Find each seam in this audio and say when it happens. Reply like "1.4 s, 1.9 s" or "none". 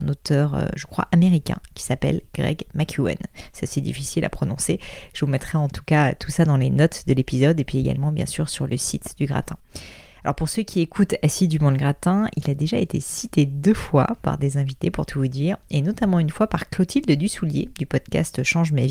none